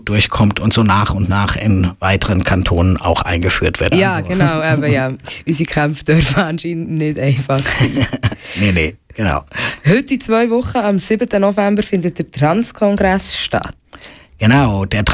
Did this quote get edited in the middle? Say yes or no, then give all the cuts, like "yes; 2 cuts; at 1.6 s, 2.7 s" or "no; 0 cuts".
yes; 1 cut; at 3.9 s